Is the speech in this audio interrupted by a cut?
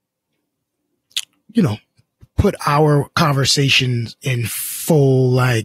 no; 0 cuts

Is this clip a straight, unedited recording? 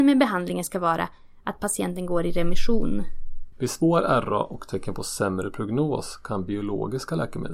no; 1 cut; at 3.5 s

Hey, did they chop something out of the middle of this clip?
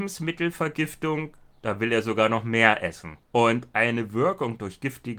yes; 1 cut; at 3.2 s

